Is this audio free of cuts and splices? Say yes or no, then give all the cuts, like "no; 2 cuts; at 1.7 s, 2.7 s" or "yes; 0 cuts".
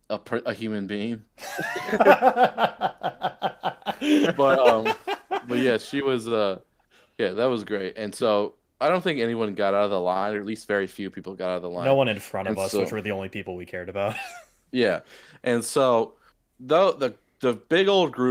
yes; 0 cuts